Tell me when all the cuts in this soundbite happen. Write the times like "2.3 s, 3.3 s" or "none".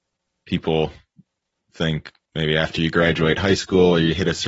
2.2 s